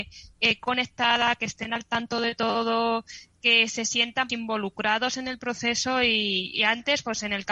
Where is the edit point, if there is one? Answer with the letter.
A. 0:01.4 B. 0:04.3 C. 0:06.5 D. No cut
B